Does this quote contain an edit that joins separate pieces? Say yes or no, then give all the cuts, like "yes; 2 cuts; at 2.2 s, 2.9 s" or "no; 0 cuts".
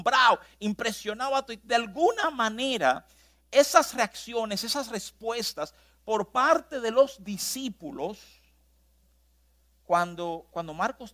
no; 0 cuts